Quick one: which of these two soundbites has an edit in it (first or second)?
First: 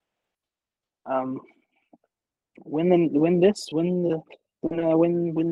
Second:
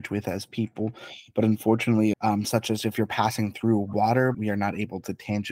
second